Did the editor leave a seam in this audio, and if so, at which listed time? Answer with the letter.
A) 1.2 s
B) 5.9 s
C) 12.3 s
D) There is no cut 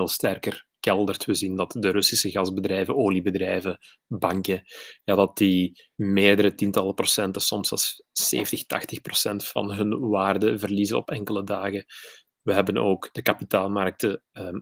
B